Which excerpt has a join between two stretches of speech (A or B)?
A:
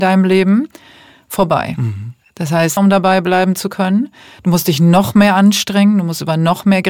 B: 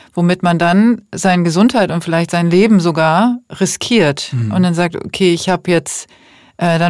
A